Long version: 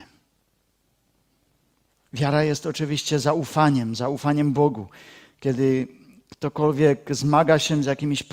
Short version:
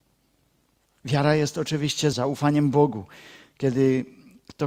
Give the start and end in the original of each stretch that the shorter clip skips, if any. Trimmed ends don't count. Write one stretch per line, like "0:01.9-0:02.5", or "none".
0:03.2-0:03.9